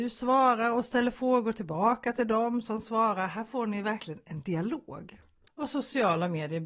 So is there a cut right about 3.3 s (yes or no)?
no